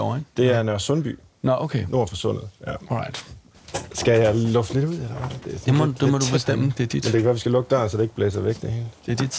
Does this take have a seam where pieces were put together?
no; 0 cuts

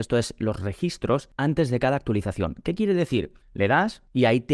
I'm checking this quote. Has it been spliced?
yes; 1 cut; at 3.4 s

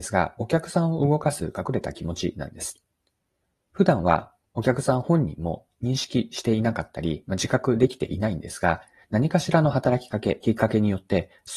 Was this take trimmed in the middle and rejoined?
no; 0 cuts

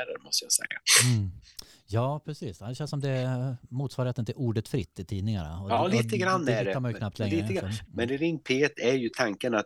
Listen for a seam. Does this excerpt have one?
yes; 1 cut; at 7.8 s

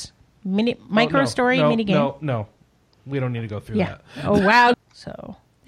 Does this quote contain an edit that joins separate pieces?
yes; 1 cut; at 4.7 s

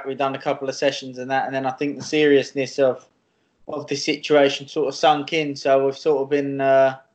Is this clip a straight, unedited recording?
yes; 0 cuts

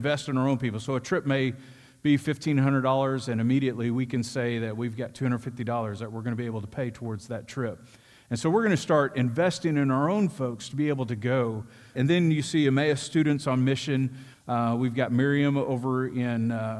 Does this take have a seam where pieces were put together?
yes; 2 cuts; at 11.9 s, 14.3 s

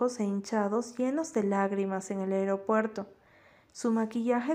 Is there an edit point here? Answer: no; 0 cuts

